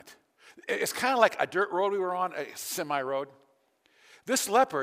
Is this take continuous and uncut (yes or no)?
yes